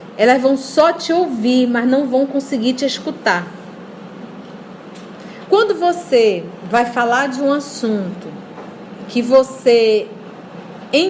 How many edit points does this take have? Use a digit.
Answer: 1